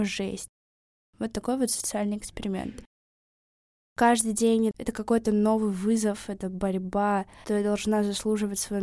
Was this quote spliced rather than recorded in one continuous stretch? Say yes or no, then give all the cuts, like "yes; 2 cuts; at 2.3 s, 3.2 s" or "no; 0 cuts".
yes; 1 cut; at 3.9 s